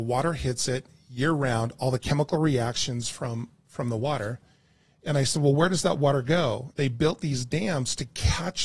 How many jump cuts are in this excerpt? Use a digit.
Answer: 1